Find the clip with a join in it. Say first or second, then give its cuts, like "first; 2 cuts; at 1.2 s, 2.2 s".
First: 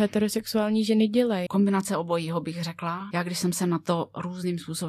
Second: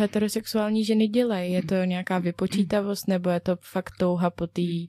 first; 2 cuts; at 1.5 s, 3.1 s